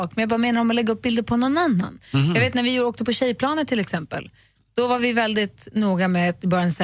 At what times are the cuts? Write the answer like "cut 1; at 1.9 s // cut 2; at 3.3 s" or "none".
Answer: none